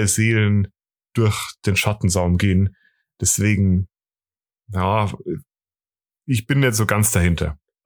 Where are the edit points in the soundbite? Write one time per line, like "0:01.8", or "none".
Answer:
none